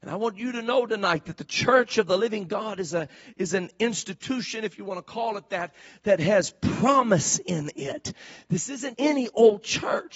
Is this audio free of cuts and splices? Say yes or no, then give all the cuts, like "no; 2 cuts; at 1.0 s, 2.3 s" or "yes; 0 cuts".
no; 1 cut; at 8.9 s